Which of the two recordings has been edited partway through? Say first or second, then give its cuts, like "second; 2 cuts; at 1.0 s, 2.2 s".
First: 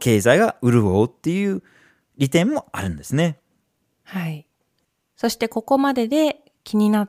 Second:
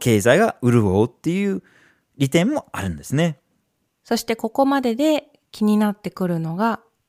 second; 1 cut; at 3.9 s